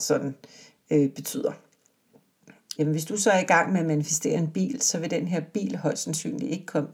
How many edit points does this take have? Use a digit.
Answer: 1